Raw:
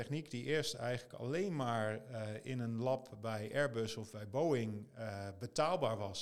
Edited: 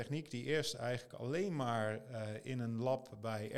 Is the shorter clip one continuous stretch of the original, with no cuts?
yes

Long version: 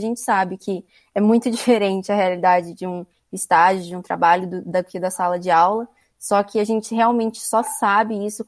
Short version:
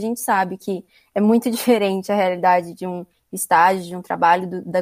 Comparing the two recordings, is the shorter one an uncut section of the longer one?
yes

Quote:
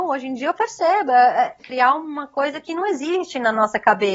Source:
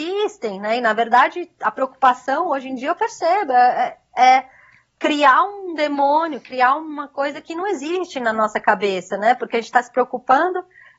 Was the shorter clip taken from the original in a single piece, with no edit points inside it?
no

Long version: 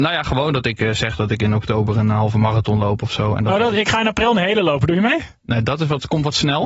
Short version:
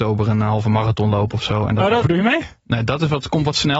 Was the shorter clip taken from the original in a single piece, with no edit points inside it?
no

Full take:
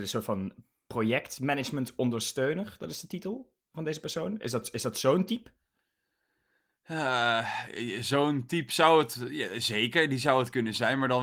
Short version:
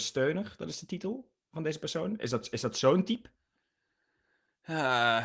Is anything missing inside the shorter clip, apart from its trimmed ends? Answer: no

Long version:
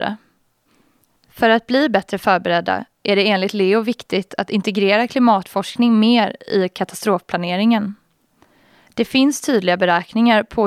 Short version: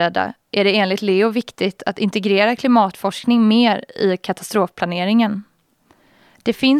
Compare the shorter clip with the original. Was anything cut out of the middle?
no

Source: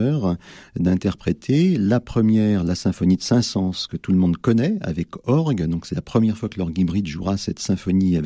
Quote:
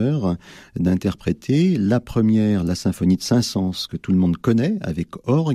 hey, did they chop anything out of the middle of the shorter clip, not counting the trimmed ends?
no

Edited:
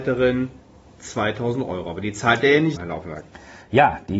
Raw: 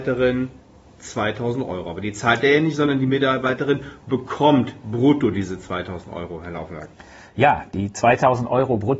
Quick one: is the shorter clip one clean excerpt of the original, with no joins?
no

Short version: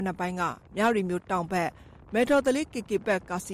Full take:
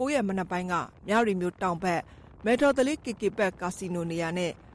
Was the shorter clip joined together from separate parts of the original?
no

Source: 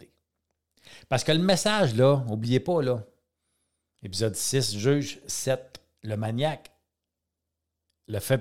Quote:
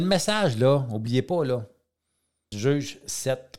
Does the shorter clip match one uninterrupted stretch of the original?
no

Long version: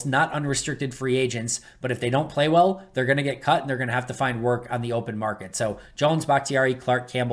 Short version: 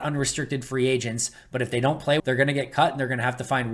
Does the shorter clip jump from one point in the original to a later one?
yes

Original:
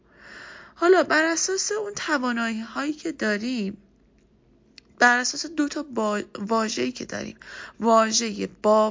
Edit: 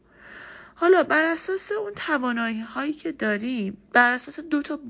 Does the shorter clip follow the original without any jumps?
no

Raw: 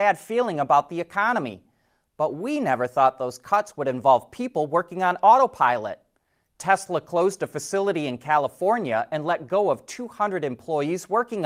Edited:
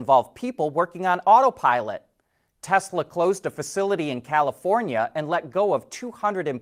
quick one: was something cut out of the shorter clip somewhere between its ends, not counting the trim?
no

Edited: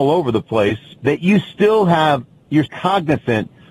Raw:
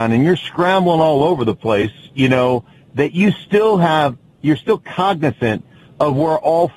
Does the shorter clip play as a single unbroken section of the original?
no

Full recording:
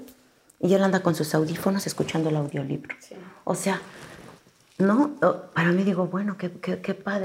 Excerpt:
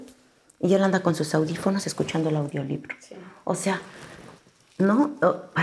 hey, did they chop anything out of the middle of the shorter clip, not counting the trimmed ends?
no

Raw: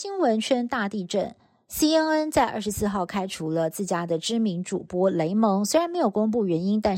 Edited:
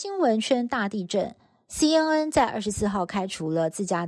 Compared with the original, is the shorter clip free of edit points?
yes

